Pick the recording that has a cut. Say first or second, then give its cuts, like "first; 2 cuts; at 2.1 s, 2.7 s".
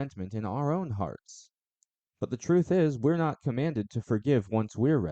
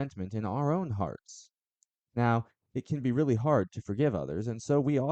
first; 1 cut; at 2.0 s